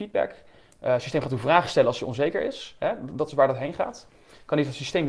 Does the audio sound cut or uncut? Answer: uncut